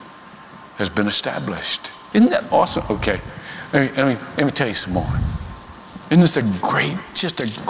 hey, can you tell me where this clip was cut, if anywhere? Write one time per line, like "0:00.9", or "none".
0:02.1